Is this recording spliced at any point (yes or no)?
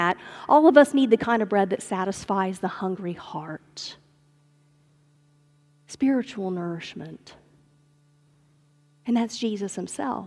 no